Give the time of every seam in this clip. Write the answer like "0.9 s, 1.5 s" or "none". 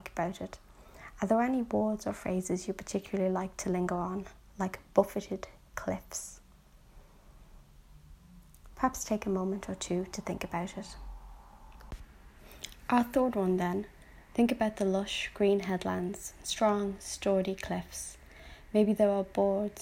8.7 s, 14.3 s

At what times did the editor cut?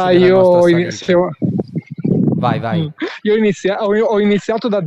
none

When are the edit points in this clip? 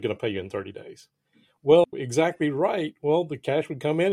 1.8 s

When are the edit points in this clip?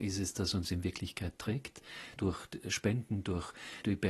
2.2 s

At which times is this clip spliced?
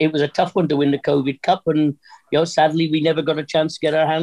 none

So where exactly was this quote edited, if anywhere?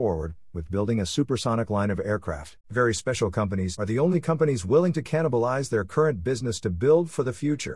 2.6 s, 3.8 s

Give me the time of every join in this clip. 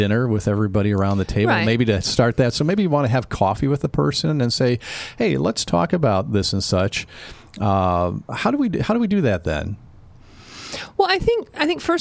none

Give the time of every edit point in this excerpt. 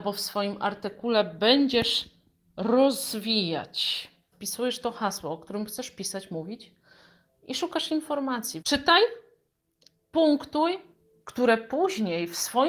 4.3 s, 8.6 s, 11.2 s

